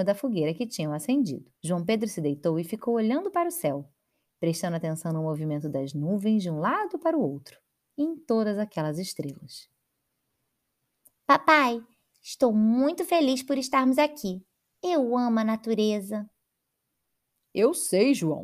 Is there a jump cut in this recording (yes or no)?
yes